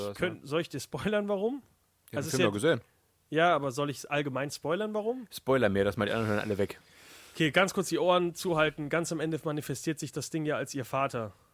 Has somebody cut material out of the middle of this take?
no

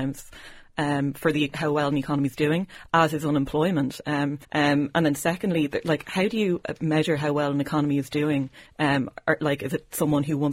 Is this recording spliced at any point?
yes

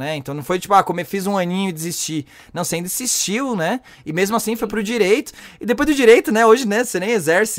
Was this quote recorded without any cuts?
yes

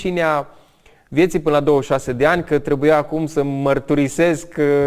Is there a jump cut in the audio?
no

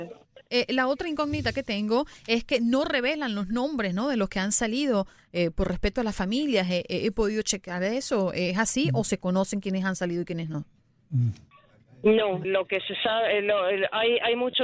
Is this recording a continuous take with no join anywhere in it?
no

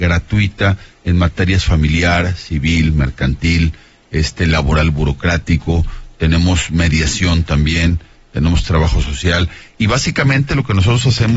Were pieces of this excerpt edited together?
no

